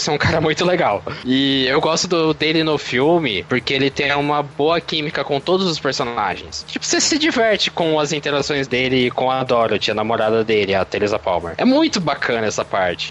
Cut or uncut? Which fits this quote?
uncut